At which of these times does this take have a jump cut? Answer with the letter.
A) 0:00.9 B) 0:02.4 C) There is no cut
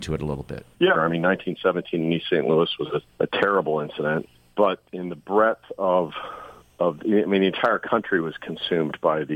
A